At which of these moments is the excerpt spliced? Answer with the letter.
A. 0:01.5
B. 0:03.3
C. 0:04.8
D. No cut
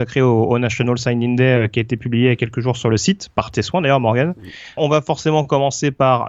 C